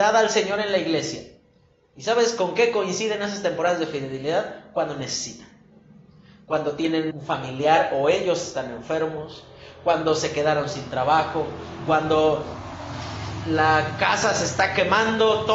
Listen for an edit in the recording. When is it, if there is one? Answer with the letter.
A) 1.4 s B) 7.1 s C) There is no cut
B